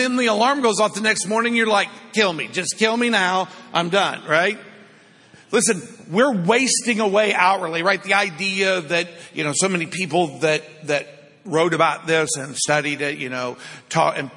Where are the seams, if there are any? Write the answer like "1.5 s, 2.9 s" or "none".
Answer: none

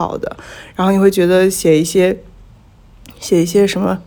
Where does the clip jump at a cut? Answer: none

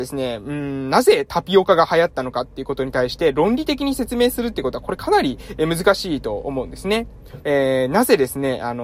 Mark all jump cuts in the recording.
7.4 s

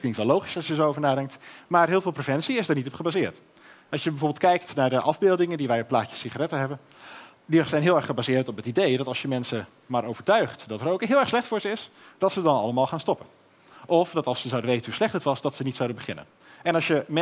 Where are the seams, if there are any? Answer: none

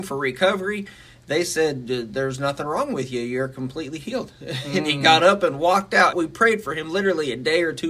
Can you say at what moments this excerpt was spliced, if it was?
6.1 s

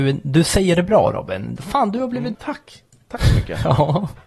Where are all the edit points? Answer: 2.3 s

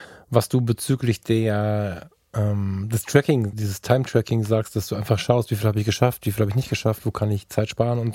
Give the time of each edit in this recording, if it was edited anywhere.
3.5 s

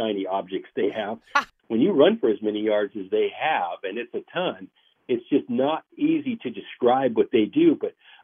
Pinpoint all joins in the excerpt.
1.6 s

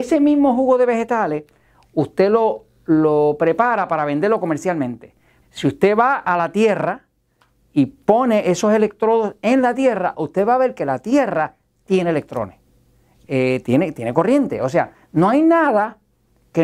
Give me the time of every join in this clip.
5.4 s

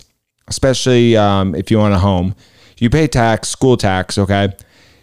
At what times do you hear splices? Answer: none

